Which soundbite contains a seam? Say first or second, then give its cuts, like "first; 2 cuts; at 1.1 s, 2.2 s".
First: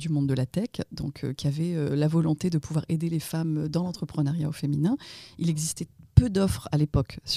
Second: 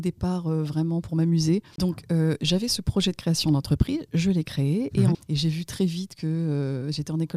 second; 2 cuts; at 1.8 s, 5.1 s